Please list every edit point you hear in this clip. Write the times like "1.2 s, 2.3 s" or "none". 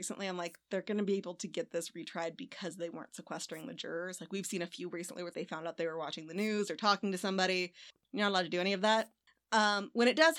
5.3 s